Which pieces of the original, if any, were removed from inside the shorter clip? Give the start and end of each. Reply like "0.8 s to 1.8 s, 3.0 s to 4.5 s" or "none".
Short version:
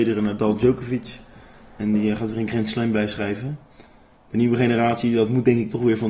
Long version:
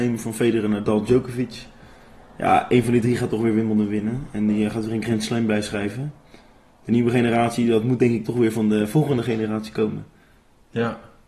2.2 s to 4.3 s